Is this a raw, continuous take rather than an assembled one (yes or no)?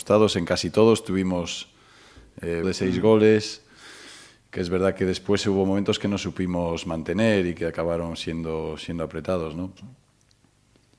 no